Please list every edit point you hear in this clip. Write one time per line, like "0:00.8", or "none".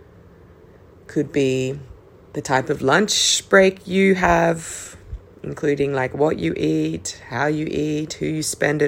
none